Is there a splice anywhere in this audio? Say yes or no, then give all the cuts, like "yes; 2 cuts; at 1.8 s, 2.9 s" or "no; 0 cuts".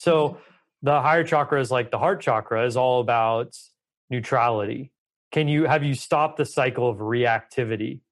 no; 0 cuts